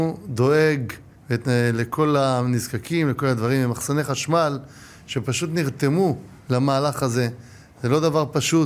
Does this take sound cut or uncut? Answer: uncut